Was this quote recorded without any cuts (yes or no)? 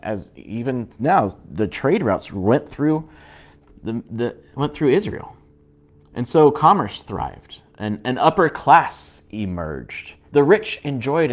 no